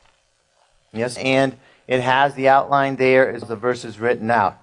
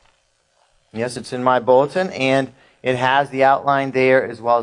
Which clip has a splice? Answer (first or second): first